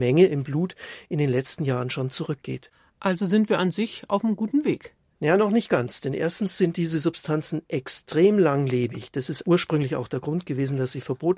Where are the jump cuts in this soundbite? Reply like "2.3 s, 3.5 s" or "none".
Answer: 9.4 s